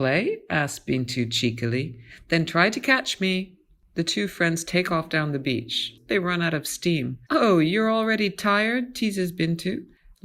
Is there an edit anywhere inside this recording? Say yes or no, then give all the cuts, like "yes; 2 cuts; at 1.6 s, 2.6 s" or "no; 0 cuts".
yes; 2 cuts; at 6.0 s, 7.3 s